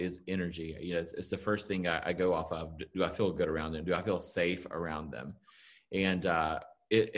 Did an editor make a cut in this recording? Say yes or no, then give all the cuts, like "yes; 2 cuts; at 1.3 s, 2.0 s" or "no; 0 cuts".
no; 0 cuts